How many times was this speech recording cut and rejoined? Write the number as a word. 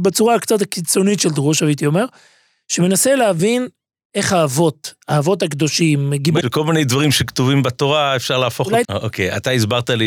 two